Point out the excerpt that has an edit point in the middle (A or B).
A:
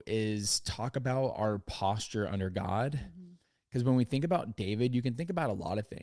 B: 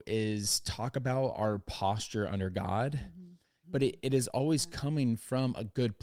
B